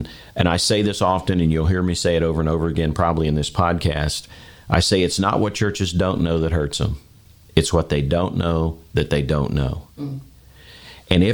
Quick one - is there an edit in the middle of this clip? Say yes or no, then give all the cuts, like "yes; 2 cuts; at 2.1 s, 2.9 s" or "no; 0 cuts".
no; 0 cuts